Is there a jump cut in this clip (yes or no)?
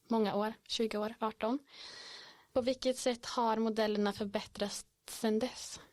no